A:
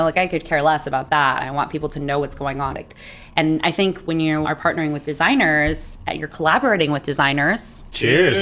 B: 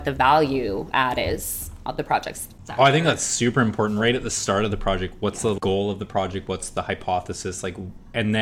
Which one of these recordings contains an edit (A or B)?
A